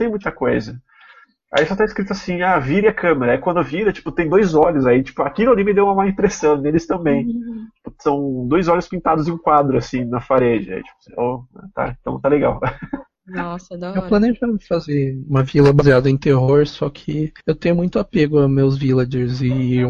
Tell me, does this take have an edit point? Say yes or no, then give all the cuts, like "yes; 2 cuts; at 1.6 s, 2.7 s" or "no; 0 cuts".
yes; 1 cut; at 17.4 s